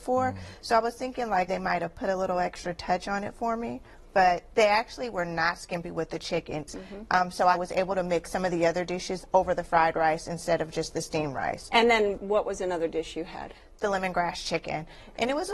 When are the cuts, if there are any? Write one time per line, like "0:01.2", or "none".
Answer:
0:01.5
0:06.7